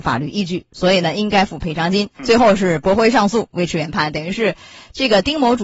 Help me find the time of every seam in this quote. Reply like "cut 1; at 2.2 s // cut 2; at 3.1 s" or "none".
cut 1; at 2.1 s